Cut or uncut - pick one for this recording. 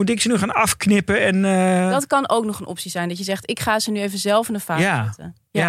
uncut